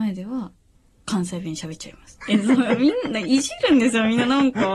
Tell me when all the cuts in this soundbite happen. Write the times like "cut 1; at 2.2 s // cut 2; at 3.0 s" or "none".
cut 1; at 2.2 s